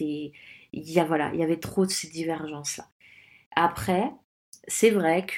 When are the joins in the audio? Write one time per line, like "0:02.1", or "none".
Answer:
none